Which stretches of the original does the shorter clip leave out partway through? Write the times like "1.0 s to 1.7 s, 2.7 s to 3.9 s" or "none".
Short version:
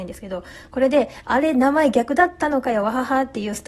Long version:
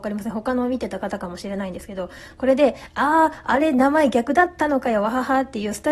2.9 s to 3.4 s